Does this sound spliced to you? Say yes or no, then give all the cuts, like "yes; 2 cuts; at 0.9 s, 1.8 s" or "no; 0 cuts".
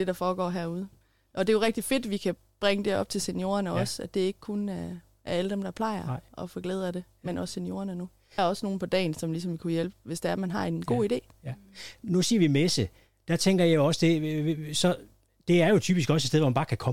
no; 0 cuts